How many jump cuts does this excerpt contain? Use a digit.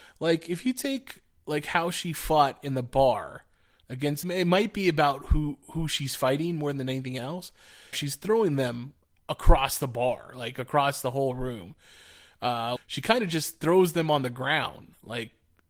3